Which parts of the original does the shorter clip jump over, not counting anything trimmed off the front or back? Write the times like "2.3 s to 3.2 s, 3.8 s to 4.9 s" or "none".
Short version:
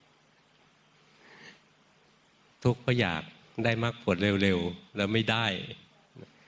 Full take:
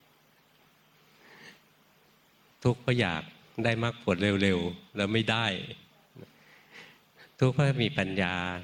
none